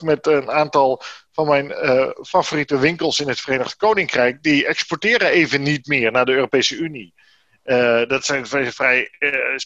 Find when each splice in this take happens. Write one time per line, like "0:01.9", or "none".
none